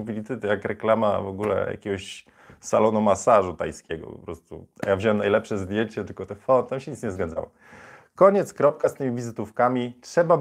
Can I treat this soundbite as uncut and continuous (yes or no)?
yes